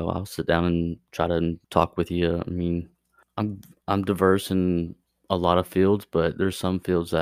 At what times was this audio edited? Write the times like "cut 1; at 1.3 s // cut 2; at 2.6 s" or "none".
cut 1; at 1.6 s // cut 2; at 3.2 s